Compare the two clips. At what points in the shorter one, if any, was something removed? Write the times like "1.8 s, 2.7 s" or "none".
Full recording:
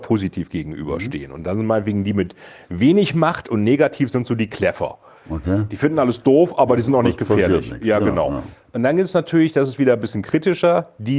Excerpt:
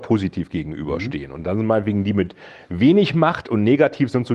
none